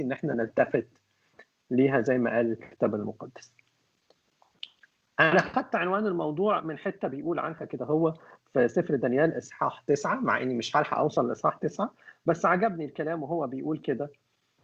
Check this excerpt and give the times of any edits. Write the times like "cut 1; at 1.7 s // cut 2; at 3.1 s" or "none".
none